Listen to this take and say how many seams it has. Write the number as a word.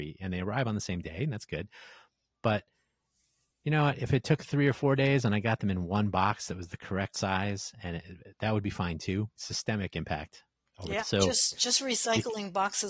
two